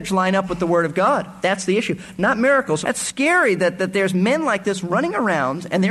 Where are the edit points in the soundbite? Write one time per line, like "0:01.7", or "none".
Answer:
0:02.8